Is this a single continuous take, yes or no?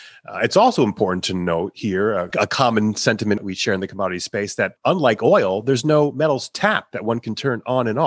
yes